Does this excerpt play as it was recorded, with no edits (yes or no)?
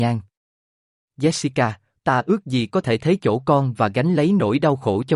no